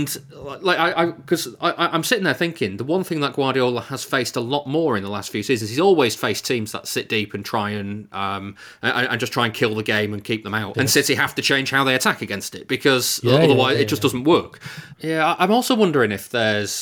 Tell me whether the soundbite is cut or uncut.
cut